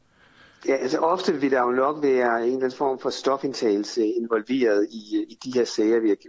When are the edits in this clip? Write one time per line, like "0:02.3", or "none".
none